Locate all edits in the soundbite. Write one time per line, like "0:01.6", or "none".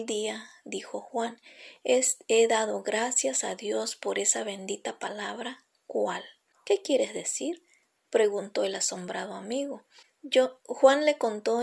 none